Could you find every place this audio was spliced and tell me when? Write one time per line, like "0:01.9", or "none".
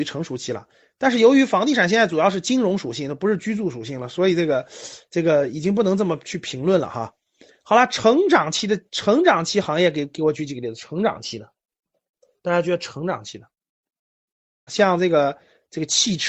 0:14.7